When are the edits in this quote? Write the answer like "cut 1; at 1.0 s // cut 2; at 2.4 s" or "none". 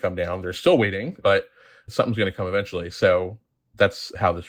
none